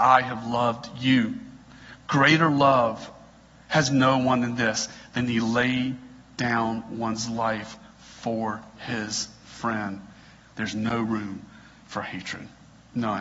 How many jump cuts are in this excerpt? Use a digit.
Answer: 1